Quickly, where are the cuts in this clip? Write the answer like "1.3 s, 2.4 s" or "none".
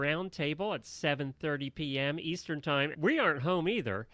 2.9 s